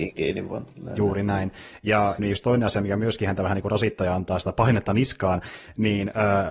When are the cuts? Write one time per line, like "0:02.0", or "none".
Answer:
0:02.2